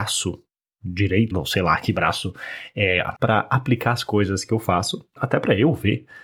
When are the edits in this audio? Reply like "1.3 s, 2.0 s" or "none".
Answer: 1.3 s, 3.2 s, 5.2 s